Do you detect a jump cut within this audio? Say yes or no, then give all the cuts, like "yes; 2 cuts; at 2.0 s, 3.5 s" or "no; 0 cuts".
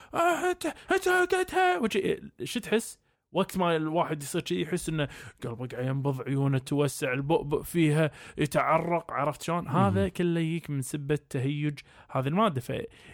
no; 0 cuts